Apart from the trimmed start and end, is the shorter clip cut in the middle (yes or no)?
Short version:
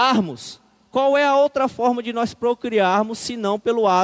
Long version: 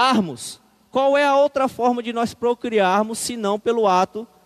no